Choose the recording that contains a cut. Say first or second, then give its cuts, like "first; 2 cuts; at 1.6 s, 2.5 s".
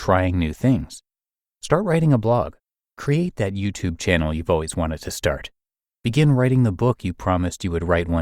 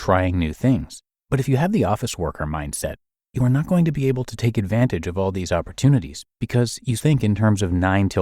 second; 2 cuts; at 1.2 s, 7.0 s